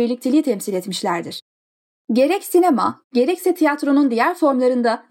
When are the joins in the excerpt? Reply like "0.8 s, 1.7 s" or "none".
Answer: 3.0 s